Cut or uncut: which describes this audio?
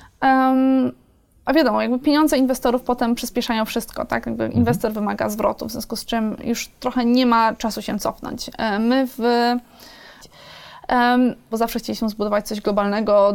cut